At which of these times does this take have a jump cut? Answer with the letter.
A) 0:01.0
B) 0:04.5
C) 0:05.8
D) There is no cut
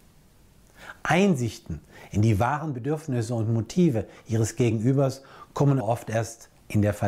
C